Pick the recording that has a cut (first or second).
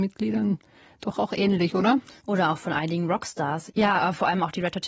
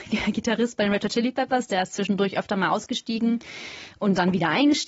first